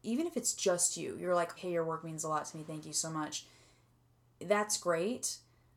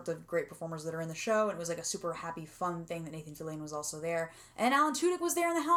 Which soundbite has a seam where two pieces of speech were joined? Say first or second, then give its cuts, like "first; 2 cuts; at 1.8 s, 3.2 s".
first; 1 cut; at 1.6 s